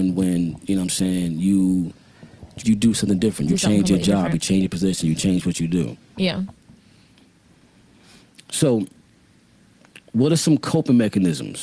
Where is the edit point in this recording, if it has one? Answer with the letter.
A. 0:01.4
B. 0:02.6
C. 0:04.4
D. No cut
B